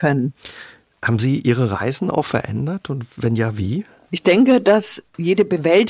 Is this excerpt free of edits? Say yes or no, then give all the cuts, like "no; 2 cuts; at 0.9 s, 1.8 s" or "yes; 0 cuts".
yes; 0 cuts